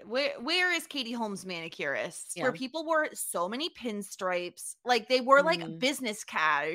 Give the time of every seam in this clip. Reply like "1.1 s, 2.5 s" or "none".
2.4 s

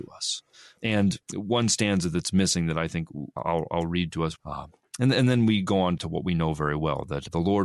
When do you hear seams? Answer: 4.4 s, 6.0 s

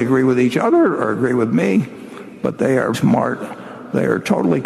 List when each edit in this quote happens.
2.9 s

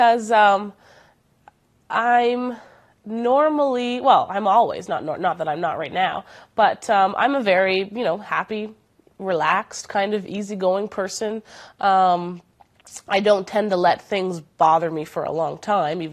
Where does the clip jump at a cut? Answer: none

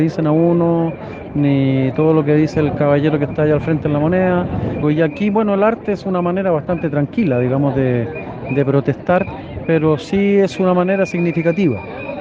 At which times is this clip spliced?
4.8 s

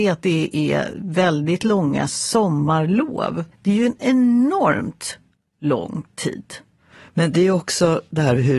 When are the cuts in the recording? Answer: 3.5 s

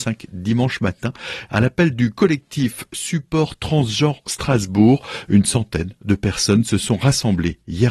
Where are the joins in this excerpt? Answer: 1.5 s

